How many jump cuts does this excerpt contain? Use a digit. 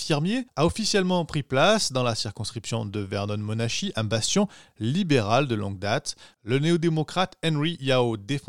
1